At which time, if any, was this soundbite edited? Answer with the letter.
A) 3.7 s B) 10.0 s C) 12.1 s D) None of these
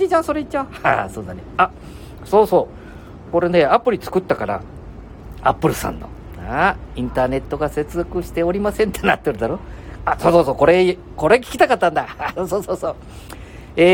B